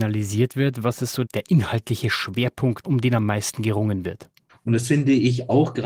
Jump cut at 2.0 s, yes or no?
no